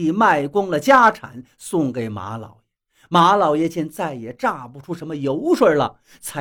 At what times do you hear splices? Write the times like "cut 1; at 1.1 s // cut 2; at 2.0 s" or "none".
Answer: none